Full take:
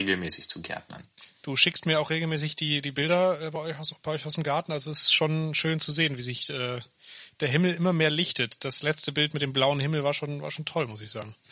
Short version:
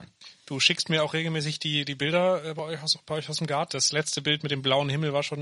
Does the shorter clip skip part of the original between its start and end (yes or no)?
yes